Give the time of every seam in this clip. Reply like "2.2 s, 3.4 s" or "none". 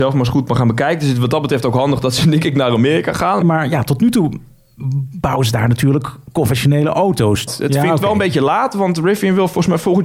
3.4 s, 7.5 s